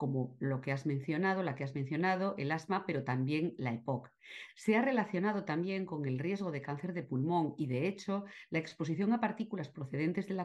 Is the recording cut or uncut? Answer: uncut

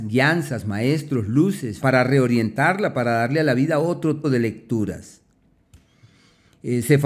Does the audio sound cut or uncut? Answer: cut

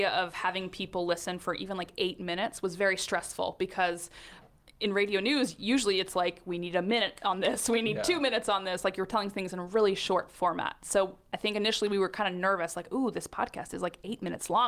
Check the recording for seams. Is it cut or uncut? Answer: uncut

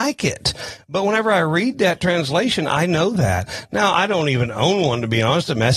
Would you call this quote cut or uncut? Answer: uncut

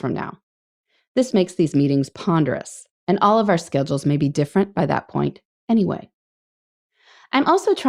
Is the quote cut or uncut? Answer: cut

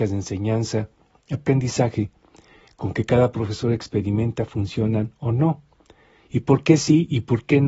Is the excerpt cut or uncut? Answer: uncut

